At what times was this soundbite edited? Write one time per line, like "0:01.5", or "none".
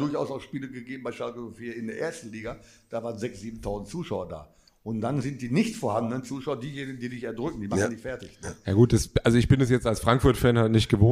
none